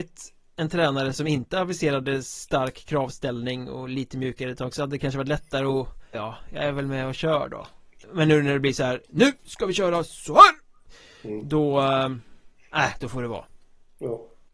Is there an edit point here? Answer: yes; 2 cuts; at 6.1 s, 8.0 s

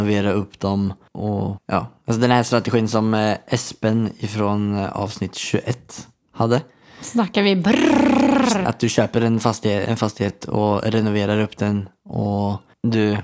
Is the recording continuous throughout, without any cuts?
no; 2 cuts; at 8.6 s, 9.9 s

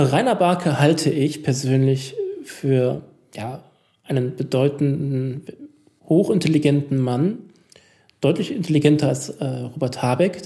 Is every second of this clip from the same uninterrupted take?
yes; 0 cuts

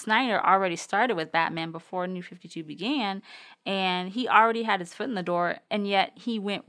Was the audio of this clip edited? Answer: yes; 1 cut; at 5.6 s

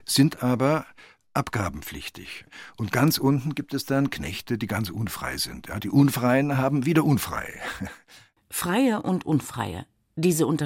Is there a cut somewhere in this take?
no; 0 cuts

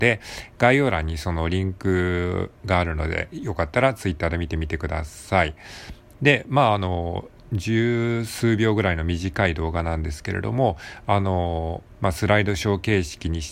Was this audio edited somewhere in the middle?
yes; 2 cuts; at 6.1 s, 11.9 s

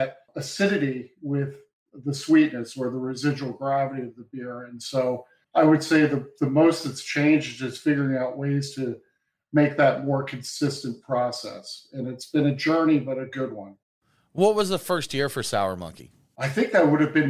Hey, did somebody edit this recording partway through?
no; 0 cuts

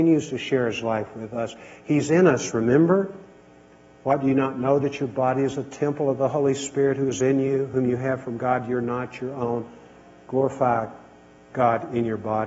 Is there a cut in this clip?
no; 0 cuts

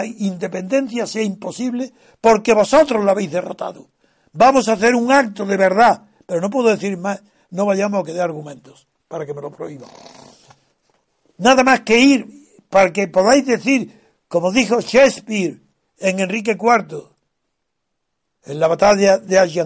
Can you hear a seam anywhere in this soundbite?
no; 0 cuts

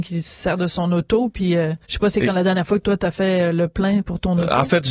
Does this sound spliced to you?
yes; 1 cut; at 1.8 s

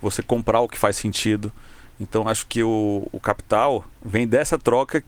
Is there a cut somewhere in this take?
yes; 1 cut; at 3.9 s

